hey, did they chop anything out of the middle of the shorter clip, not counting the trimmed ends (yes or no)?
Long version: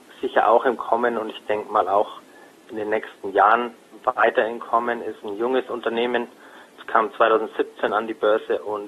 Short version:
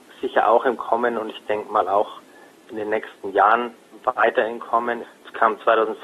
yes